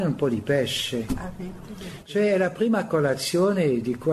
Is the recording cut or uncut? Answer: uncut